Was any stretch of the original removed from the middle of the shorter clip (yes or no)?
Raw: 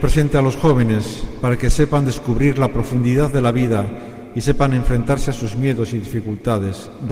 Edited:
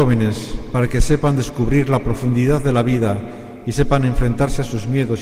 no